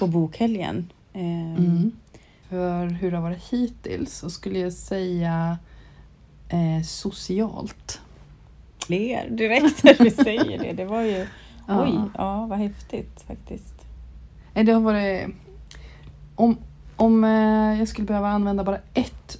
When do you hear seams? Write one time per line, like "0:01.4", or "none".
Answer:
0:02.4
0:08.9